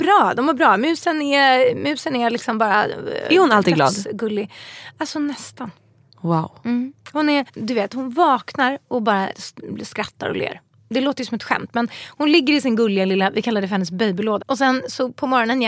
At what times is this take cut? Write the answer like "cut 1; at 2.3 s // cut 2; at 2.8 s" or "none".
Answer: cut 1; at 7.5 s // cut 2; at 14.4 s